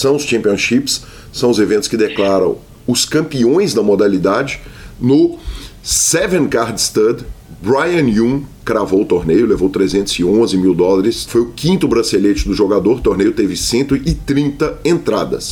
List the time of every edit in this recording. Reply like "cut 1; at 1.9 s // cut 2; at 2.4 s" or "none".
cut 1; at 11.3 s